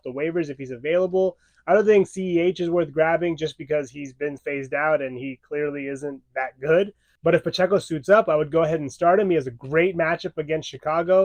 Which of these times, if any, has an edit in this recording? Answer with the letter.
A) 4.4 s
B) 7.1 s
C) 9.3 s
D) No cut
A